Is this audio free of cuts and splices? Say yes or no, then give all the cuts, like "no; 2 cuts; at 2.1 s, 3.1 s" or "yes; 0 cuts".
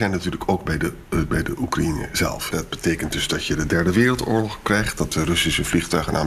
no; 1 cut; at 2.5 s